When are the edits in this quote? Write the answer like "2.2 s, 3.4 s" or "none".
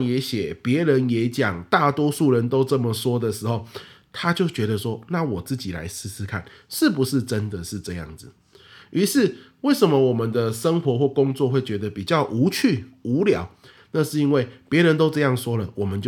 none